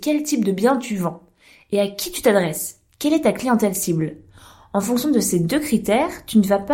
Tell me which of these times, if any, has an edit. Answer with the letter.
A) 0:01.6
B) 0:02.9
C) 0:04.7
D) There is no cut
D